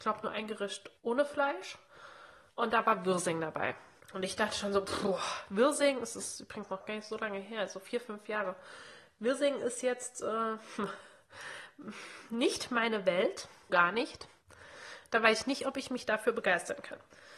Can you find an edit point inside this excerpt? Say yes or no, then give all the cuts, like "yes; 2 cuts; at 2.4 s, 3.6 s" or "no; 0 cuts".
yes; 1 cut; at 13.7 s